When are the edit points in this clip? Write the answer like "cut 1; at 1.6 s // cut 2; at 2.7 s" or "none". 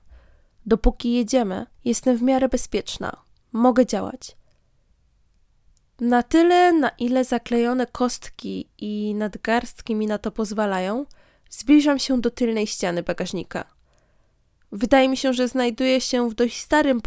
cut 1; at 1.7 s